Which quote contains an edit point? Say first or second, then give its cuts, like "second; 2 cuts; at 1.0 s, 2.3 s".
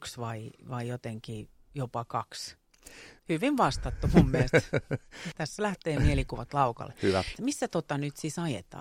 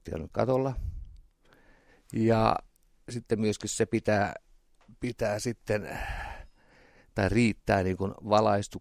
first; 3 cuts; at 3.2 s, 5.3 s, 7.4 s